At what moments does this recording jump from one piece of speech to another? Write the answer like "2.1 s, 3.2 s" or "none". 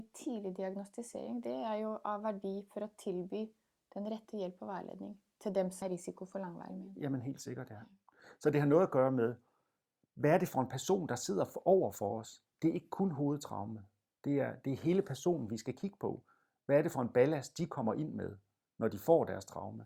5.8 s